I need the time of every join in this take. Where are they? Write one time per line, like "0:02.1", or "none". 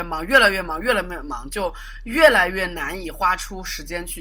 none